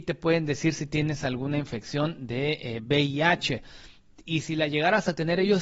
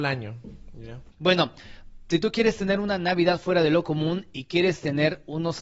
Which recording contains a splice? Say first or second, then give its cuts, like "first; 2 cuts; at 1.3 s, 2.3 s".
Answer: second; 1 cut; at 1.1 s